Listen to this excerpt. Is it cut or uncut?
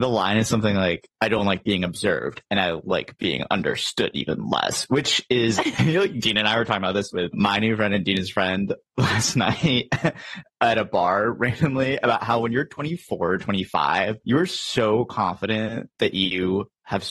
uncut